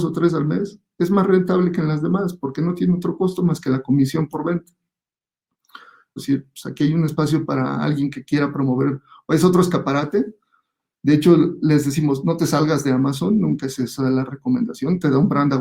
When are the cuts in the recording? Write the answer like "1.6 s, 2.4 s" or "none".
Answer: 6.2 s